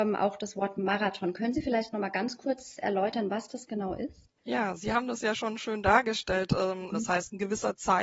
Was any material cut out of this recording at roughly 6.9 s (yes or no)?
yes